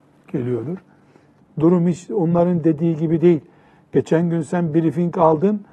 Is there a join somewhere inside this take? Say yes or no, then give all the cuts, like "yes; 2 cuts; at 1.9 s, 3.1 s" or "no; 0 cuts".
yes; 1 cut; at 1.4 s